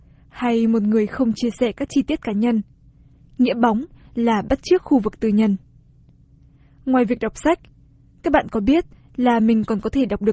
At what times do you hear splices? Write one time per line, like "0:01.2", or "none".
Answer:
0:03.2